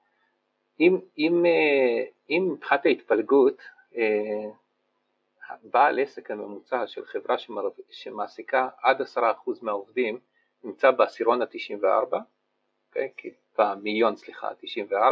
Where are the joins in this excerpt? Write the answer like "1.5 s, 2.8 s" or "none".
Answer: none